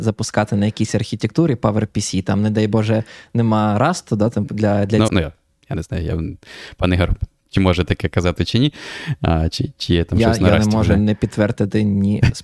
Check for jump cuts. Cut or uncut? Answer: cut